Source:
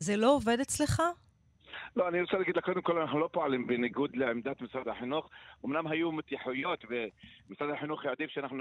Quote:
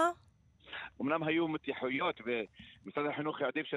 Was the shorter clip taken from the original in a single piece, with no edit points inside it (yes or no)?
no